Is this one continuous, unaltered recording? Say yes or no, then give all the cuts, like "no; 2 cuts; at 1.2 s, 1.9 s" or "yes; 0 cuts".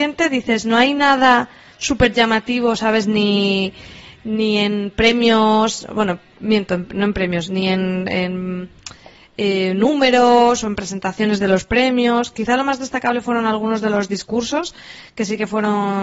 yes; 0 cuts